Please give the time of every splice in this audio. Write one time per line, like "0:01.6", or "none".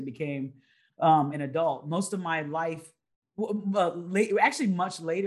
none